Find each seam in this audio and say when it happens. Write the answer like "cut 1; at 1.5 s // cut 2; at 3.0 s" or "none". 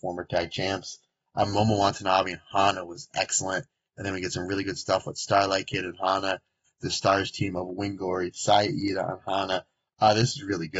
cut 1; at 6.6 s